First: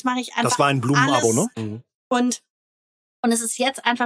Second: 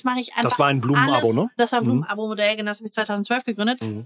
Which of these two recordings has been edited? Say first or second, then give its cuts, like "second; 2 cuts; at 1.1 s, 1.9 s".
first; 1 cut; at 1.5 s